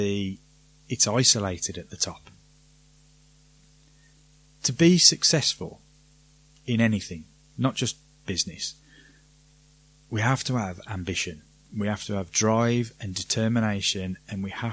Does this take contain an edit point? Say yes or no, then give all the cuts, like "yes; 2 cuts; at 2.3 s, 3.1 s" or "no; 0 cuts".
no; 0 cuts